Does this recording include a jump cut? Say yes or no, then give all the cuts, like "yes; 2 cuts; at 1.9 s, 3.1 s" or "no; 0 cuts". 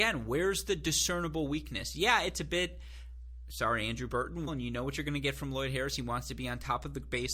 yes; 1 cut; at 4.5 s